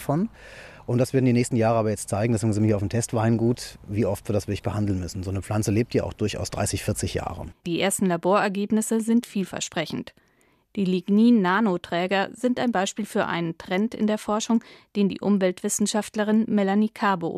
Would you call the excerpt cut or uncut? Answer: uncut